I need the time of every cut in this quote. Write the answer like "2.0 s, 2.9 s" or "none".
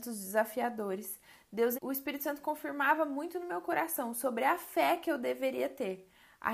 1.7 s